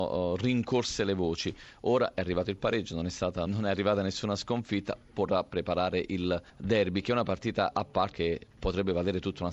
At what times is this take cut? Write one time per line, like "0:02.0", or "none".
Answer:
0:03.5
0:06.5
0:08.1